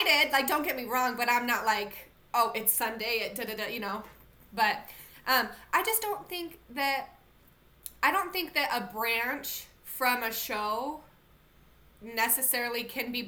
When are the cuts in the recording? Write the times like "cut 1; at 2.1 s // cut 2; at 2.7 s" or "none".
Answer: none